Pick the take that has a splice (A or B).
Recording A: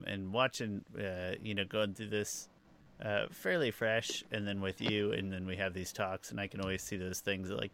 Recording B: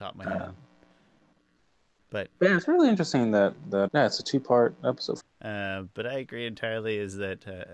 B